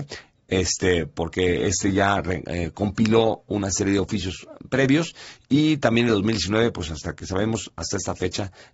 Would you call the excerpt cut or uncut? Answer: uncut